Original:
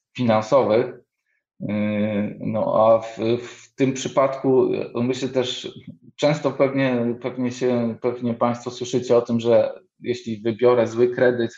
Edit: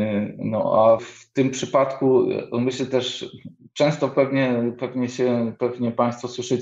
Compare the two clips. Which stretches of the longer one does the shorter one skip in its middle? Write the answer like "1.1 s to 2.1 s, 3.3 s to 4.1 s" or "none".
3.0 s to 3.4 s